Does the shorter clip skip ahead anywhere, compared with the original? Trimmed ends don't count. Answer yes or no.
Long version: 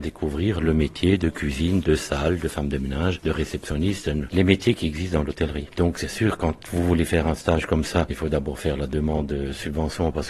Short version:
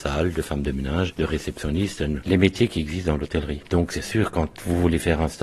no